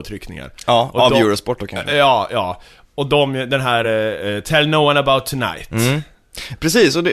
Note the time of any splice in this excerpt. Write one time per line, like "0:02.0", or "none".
none